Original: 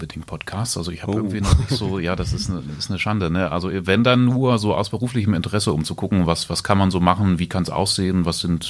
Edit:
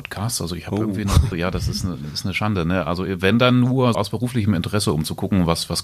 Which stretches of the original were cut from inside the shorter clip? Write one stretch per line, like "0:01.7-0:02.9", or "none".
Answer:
0:01.7-0:02.0
0:04.6-0:04.7